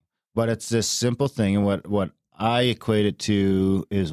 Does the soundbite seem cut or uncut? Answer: uncut